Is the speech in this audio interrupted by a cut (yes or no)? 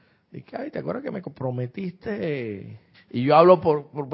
yes